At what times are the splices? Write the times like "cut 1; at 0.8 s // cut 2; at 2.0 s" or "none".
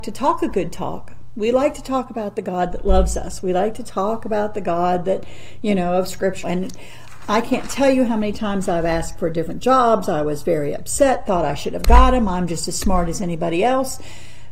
cut 1; at 6.4 s